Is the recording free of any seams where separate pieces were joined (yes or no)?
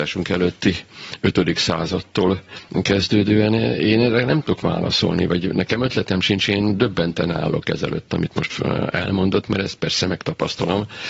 yes